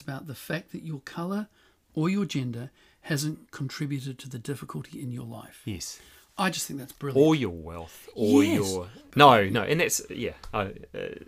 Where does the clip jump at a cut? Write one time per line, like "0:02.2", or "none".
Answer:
0:09.1